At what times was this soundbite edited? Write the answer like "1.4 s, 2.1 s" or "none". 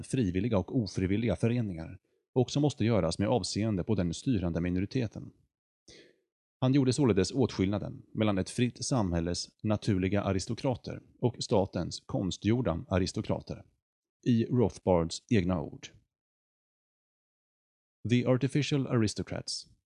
14.2 s